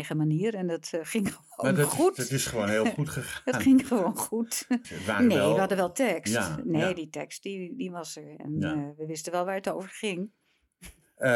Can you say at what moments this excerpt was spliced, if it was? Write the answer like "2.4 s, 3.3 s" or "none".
4.8 s